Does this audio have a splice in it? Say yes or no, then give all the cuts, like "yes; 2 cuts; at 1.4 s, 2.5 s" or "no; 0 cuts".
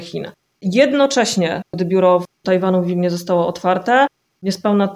yes; 1 cut; at 1.7 s